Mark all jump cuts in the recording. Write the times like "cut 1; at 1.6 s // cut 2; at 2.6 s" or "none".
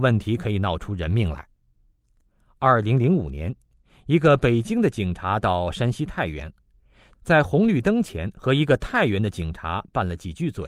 none